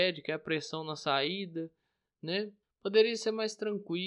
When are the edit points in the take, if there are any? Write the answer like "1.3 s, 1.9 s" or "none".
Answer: 2.6 s